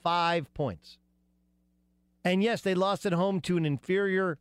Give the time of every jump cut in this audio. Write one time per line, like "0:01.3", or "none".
0:02.0

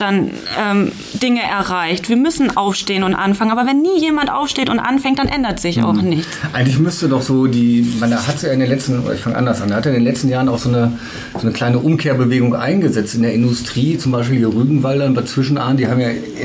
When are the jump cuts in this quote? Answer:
none

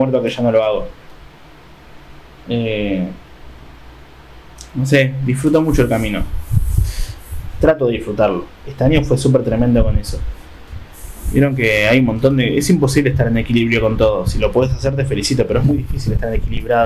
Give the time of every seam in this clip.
0:08.6

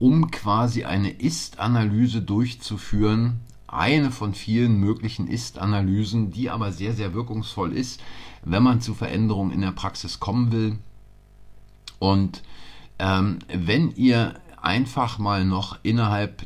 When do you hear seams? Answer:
none

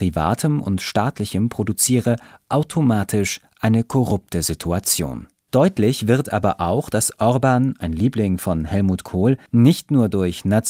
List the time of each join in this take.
none

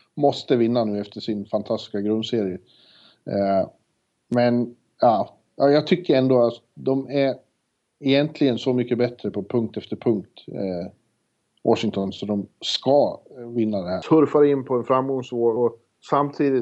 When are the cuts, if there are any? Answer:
0:14.0
0:15.6

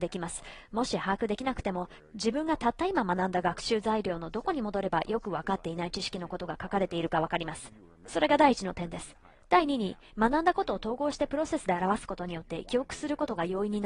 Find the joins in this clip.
none

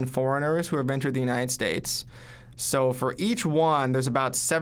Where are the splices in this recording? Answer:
0:02.5

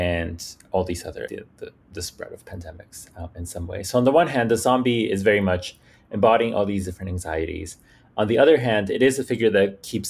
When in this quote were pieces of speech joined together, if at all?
0:01.3

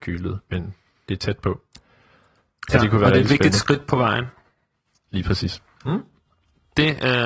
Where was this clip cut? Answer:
0:05.8

